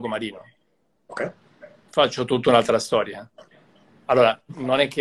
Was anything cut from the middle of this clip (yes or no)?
no